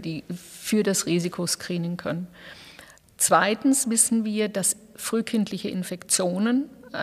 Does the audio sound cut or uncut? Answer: uncut